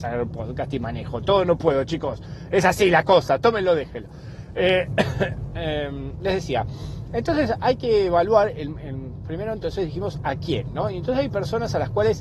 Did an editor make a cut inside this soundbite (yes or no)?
no